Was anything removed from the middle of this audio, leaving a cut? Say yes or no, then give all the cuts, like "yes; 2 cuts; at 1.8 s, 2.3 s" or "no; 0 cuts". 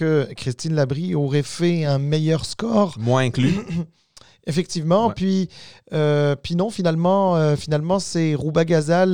no; 0 cuts